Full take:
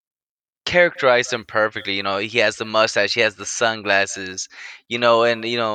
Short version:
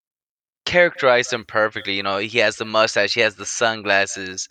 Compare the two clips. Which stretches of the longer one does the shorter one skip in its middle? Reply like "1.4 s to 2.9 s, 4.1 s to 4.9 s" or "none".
none